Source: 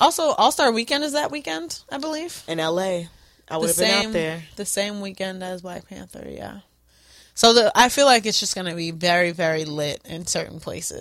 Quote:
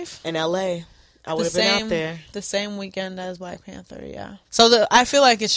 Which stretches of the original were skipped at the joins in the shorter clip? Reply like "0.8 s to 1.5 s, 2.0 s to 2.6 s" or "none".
6.7 s to 7.3 s